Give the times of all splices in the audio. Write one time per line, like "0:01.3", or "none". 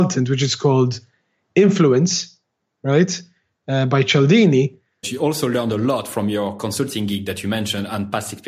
0:05.0